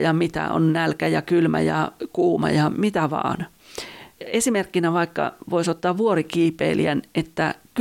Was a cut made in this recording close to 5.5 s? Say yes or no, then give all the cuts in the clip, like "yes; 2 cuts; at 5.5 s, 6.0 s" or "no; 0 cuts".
no; 1 cut; at 4.2 s